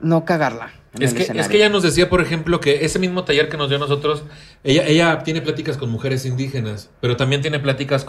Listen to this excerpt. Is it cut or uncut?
uncut